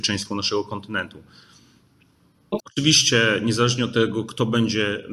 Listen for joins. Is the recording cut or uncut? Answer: cut